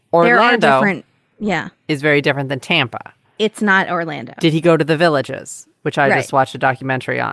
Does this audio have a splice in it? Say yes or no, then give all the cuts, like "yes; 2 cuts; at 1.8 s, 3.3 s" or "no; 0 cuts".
no; 0 cuts